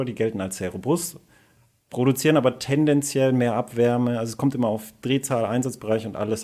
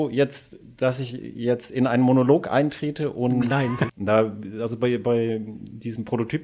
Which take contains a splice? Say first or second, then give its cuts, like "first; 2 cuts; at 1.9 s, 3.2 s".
second; 1 cut; at 3.9 s